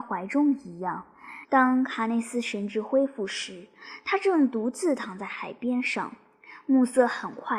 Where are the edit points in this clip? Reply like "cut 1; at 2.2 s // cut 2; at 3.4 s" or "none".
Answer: cut 1; at 1.4 s

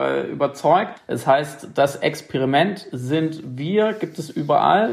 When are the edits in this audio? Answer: cut 1; at 1.0 s

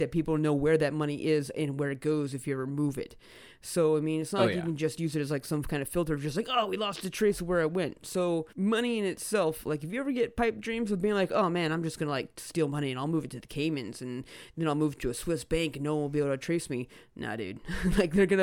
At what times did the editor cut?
cut 1; at 8.5 s

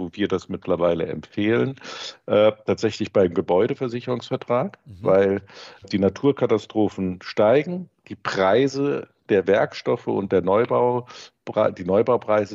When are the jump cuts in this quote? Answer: cut 1; at 5.8 s

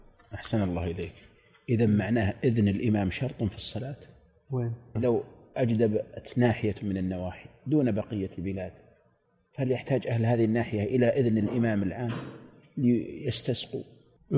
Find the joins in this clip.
cut 1; at 4.9 s

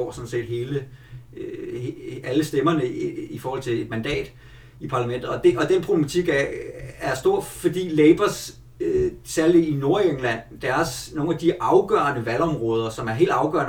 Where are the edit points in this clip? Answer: none

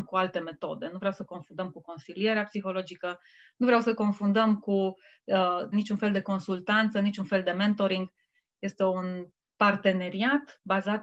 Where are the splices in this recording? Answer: cut 1; at 5.7 s

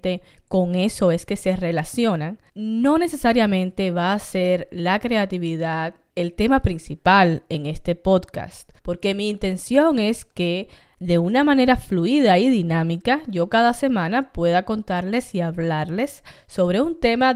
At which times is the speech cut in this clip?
cut 1; at 2.5 s // cut 2; at 8.8 s

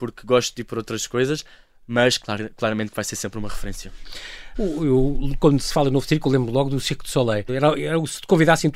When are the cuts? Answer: cut 1; at 4.5 s // cut 2; at 7.5 s

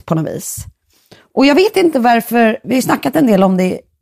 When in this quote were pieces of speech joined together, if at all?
cut 1; at 2.6 s

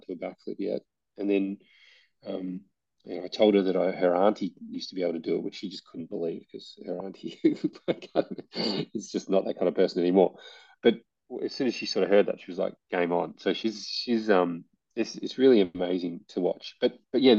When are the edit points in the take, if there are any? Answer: none

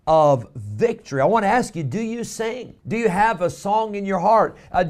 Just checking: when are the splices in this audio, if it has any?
cut 1; at 2.8 s

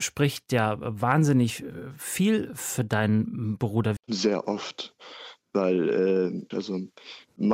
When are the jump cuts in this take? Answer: cut 1; at 4.0 s // cut 2; at 6.5 s

